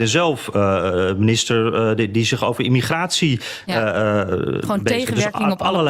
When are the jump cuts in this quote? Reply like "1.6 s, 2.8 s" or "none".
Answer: none